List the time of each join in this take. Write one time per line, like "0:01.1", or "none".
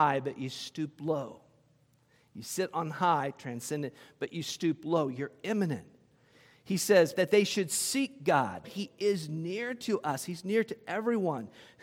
0:07.2
0:08.6

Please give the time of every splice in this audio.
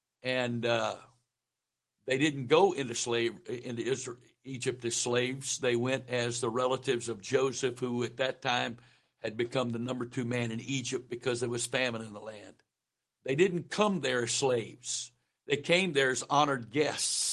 0:13.0

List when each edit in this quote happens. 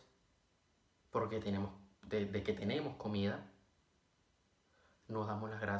none

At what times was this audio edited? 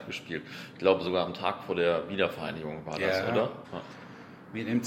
0:03.6

